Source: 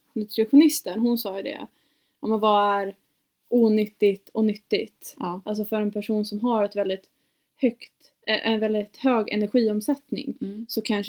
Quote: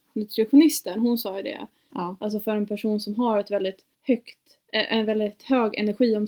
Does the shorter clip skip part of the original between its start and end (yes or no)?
yes